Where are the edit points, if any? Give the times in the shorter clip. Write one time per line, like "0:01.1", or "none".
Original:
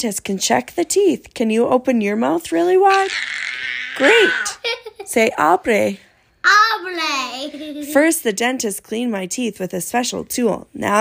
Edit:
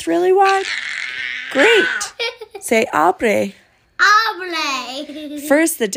none